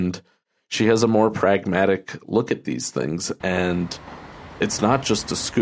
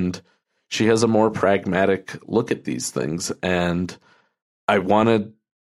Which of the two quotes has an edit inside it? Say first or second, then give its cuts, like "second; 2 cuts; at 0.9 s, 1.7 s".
first; 1 cut; at 3.4 s